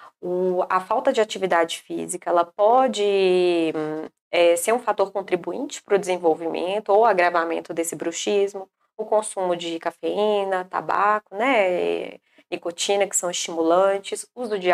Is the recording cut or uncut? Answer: uncut